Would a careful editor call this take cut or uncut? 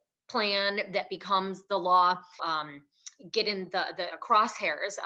cut